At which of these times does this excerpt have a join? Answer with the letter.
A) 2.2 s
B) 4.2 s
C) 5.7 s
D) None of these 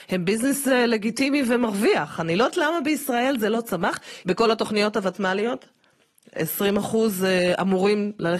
B